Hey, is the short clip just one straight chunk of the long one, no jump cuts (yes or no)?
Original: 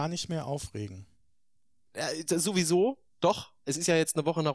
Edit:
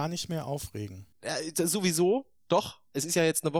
no